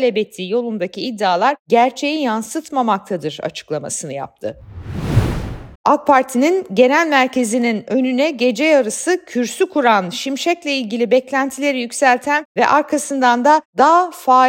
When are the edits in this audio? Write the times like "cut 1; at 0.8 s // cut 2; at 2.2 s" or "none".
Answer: cut 1; at 5.8 s